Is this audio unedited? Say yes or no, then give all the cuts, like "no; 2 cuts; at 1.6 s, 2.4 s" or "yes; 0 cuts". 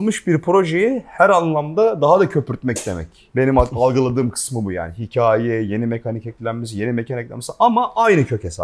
yes; 0 cuts